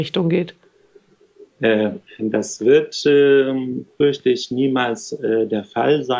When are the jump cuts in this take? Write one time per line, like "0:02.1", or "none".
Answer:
0:01.5